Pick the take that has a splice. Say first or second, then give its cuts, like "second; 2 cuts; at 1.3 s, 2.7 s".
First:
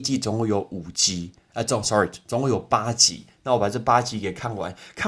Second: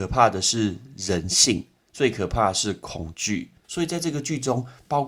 second; 1 cut; at 3.6 s